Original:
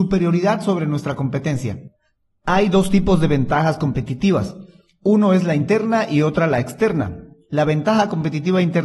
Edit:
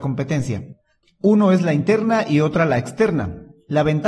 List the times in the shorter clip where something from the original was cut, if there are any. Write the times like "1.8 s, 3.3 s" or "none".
1.0 s